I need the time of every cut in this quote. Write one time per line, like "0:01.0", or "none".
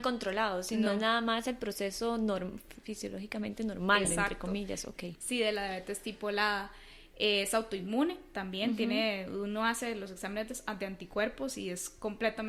none